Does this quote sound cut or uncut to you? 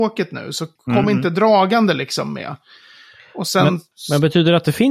uncut